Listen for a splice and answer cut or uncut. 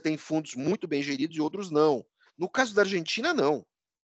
cut